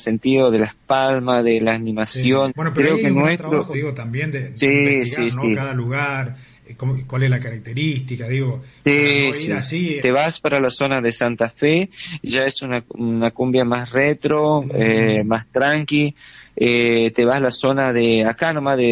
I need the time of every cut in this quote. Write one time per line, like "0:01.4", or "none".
0:02.5
0:03.7
0:10.0